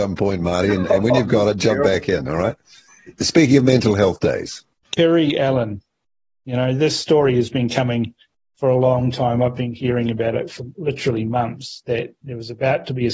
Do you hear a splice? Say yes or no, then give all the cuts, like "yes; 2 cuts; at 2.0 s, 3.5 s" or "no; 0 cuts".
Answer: no; 0 cuts